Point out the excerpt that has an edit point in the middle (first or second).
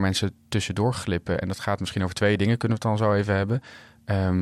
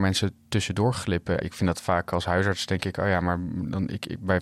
second